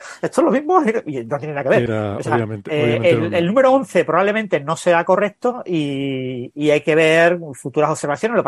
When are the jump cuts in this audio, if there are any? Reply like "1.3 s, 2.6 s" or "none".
none